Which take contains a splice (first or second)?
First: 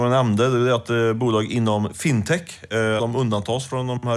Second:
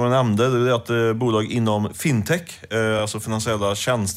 first